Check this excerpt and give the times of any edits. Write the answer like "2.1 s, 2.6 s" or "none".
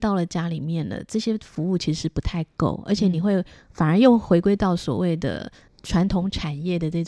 none